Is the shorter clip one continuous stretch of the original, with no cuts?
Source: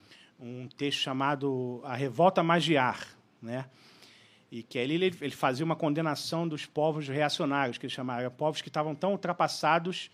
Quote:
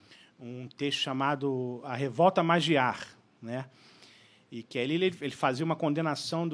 yes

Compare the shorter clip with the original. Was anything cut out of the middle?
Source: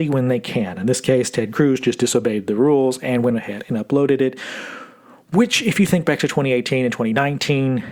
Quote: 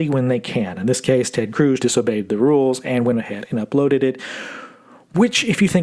yes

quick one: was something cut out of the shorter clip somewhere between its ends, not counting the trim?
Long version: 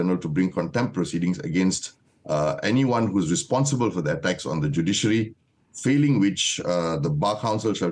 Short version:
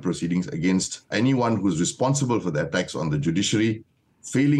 yes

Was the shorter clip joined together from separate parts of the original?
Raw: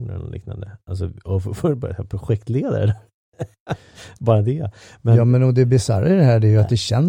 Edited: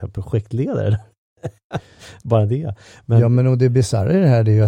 no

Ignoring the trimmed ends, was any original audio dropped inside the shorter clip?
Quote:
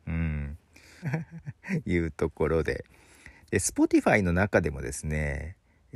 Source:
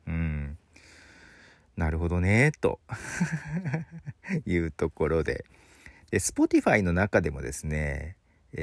yes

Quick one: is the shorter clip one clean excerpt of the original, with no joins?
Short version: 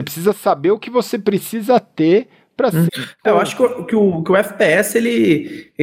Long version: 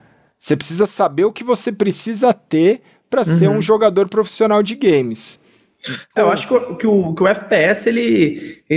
no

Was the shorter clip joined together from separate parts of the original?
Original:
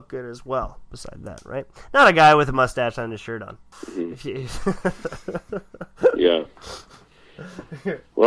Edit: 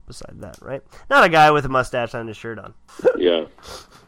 yes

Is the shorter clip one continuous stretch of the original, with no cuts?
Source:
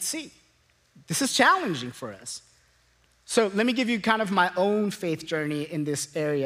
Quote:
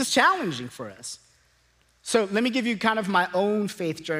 yes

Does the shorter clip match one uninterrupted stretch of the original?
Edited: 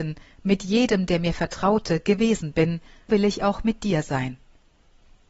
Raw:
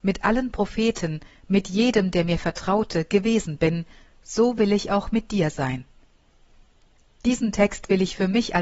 no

